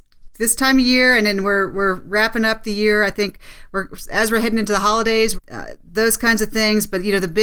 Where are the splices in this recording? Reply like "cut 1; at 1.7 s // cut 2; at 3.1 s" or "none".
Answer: cut 1; at 5.3 s